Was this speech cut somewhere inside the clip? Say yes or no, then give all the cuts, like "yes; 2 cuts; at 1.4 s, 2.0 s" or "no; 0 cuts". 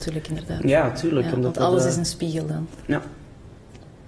no; 0 cuts